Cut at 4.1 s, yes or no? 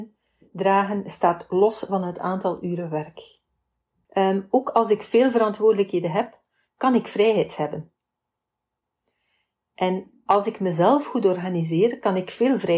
yes